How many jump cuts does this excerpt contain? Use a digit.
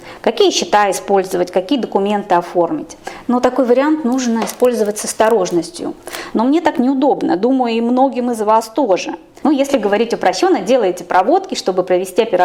3